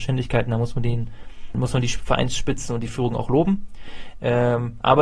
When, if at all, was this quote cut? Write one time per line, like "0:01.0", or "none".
0:01.5